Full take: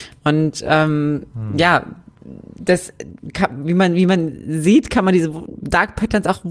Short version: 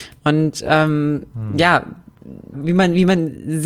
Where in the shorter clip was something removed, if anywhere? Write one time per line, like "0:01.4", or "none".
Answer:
0:02.5